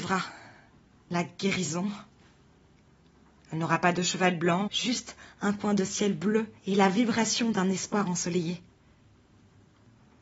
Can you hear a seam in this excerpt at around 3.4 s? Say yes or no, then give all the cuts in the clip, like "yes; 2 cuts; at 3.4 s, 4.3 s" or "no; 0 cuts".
no; 2 cuts; at 4.7 s, 6.6 s